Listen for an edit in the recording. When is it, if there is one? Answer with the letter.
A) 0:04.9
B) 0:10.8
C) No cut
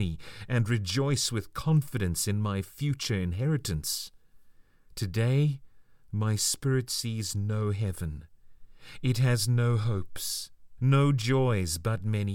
B